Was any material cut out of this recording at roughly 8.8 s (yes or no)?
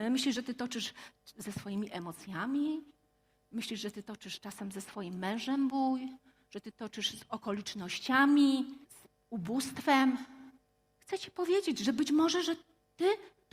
yes